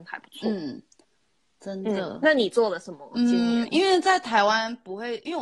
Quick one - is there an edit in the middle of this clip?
no; 0 cuts

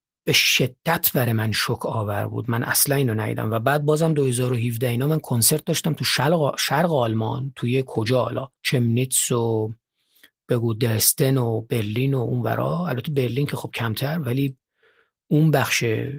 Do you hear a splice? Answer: yes; 1 cut; at 8.6 s

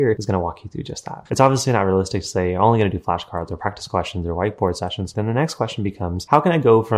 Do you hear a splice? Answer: yes; 2 cuts; at 1.3 s, 5.1 s

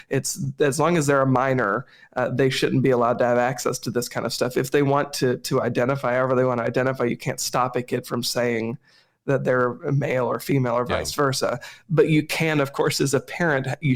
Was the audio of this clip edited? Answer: no; 0 cuts

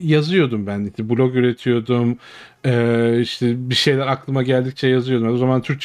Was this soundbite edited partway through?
no; 0 cuts

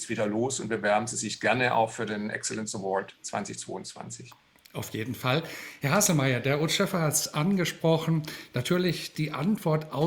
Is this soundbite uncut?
yes; 0 cuts

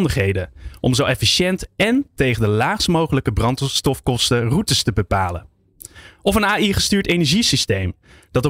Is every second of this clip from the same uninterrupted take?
yes; 0 cuts

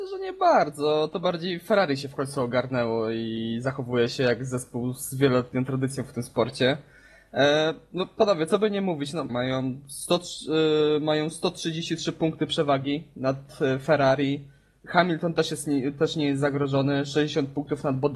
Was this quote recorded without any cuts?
no; 1 cut; at 9.3 s

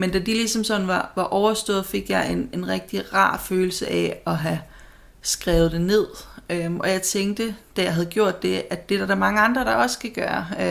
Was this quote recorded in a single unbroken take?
yes; 0 cuts

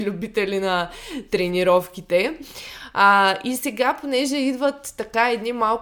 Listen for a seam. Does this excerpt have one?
no; 0 cuts

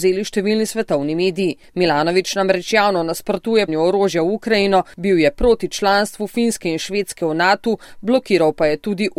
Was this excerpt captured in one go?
no; 1 cut; at 3.7 s

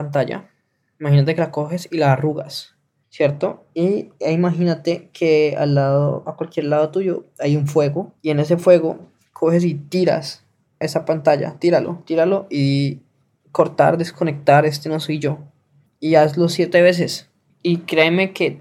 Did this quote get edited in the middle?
yes; 1 cut; at 8.2 s

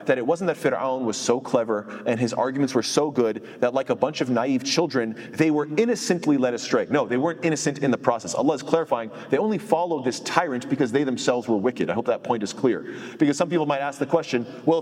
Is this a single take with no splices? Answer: yes; 0 cuts

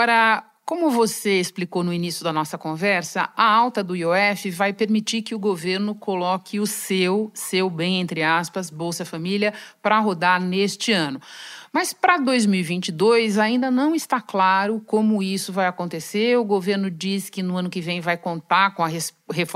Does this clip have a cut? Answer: no; 0 cuts

